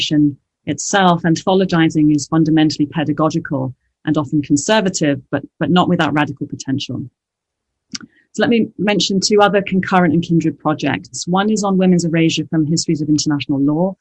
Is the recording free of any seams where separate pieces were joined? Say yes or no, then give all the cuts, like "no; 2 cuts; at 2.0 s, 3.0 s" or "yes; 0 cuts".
yes; 0 cuts